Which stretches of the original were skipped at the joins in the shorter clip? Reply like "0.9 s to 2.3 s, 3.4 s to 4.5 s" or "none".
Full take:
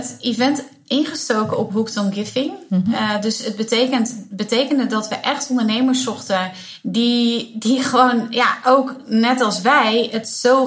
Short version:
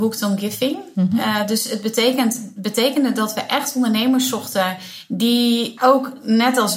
7.5 s to 8.6 s